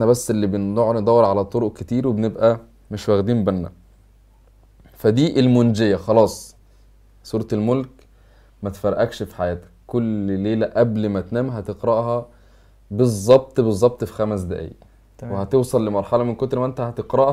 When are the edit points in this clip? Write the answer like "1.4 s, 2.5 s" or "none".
none